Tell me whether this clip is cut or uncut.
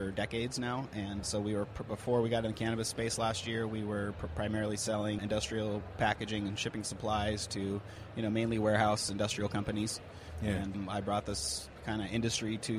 uncut